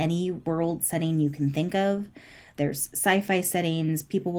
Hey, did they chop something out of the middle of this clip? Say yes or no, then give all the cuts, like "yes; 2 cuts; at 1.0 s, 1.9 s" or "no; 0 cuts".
no; 0 cuts